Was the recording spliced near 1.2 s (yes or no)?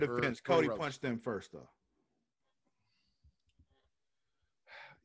no